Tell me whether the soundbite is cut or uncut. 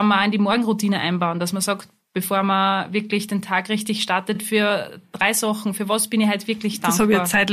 uncut